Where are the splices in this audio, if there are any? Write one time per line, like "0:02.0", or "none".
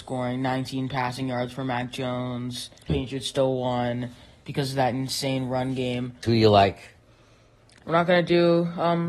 0:02.9
0:06.2